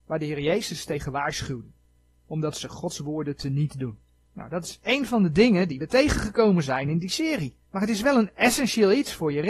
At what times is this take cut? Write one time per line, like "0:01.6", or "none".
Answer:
0:04.3
0:07.6